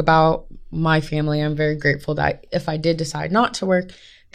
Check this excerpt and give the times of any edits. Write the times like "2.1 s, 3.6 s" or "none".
none